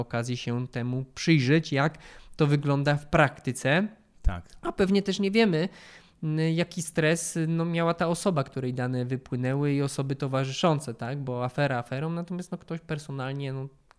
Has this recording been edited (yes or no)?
no